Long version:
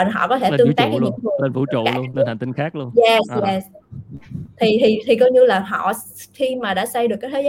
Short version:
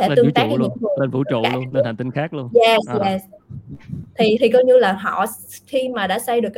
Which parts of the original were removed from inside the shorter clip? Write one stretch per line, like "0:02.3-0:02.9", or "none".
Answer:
0:04.8-0:05.0